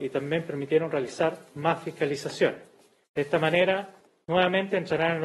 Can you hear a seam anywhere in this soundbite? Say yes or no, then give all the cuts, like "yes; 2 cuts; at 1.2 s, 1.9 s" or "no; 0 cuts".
no; 0 cuts